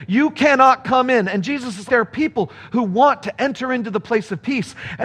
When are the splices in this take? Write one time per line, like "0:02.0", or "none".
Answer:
0:01.9